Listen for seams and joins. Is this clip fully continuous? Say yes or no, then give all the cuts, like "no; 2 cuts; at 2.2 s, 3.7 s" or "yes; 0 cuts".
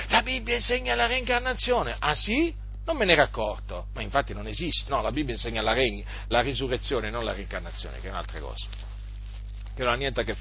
no; 2 cuts; at 4.9 s, 6.3 s